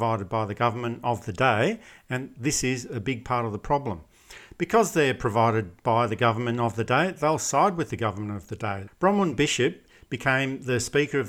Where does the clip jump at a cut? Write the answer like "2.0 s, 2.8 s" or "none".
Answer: 8.9 s